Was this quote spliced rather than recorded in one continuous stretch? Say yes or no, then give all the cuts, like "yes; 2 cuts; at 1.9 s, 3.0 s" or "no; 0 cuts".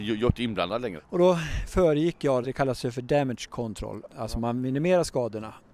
yes; 2 cuts; at 1.0 s, 2.4 s